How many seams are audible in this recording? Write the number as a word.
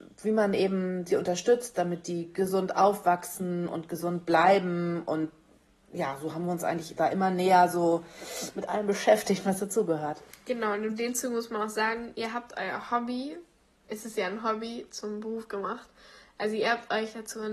zero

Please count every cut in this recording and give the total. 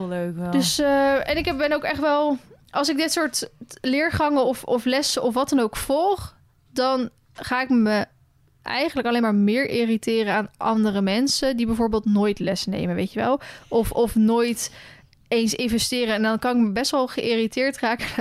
zero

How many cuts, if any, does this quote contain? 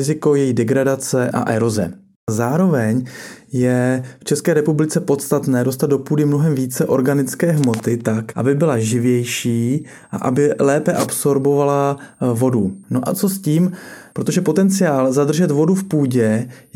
two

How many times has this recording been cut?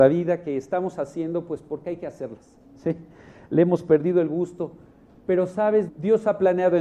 one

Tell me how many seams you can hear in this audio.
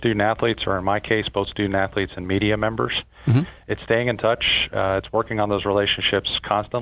one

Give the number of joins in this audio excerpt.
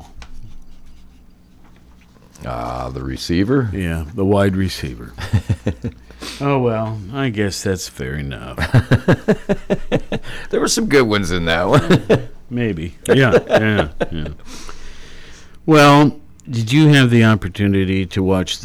two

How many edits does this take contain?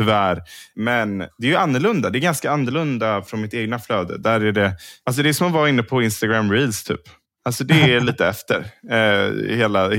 zero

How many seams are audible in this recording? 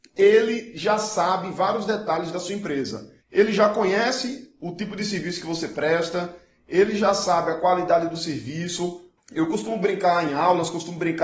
two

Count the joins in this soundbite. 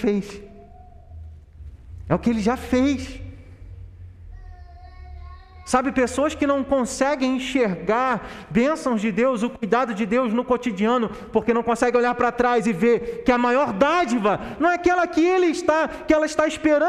zero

